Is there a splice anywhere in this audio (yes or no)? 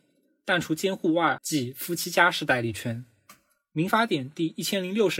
yes